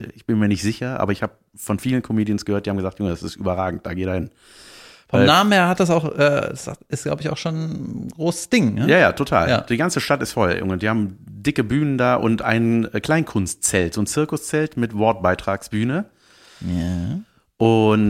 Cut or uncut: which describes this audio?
uncut